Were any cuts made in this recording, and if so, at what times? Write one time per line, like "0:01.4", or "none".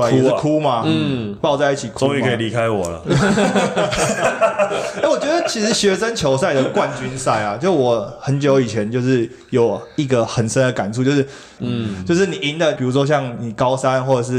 0:11.6
0:12.8